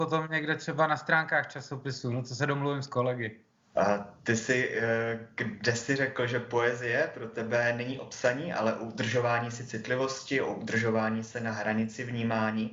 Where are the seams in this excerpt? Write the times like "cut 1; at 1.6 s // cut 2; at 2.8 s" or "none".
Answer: cut 1; at 3.7 s